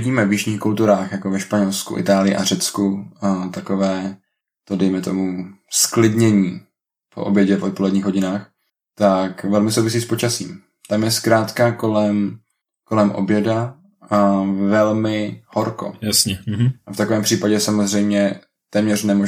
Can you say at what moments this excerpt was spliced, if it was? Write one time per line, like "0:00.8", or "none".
none